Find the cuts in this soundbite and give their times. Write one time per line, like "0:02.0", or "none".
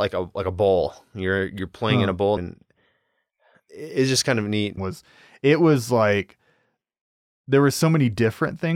0:02.4
0:04.8